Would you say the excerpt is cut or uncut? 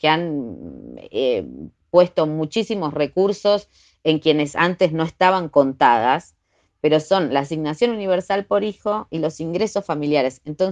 uncut